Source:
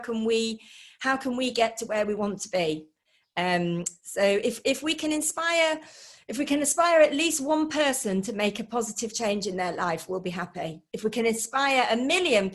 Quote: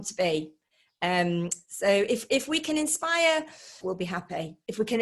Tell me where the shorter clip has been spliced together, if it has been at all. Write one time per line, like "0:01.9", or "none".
0:03.8